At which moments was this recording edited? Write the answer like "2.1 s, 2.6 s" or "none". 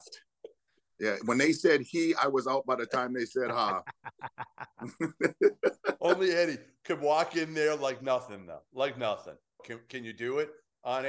9.6 s